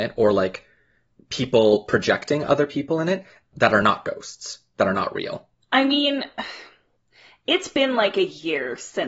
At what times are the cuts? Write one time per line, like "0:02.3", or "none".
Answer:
0:05.6